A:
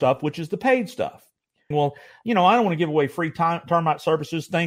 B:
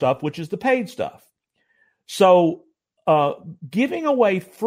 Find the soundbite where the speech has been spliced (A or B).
A